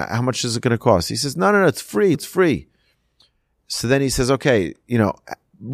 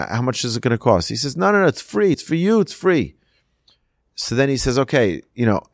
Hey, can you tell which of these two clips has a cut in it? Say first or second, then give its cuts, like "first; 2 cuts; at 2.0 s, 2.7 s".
first; 1 cut; at 2.1 s